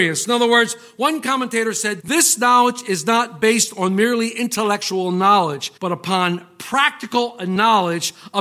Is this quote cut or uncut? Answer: cut